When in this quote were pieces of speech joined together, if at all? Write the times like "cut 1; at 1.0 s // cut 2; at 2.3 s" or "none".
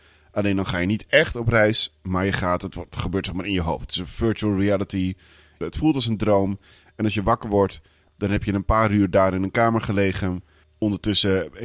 cut 1; at 5.6 s